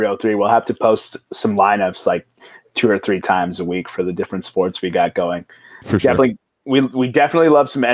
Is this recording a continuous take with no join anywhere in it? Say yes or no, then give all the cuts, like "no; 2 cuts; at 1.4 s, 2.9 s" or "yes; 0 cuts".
yes; 0 cuts